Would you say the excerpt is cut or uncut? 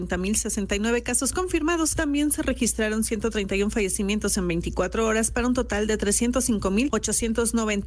uncut